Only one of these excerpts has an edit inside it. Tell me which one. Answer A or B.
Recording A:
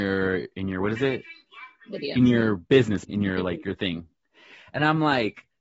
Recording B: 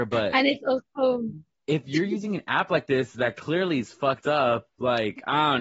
A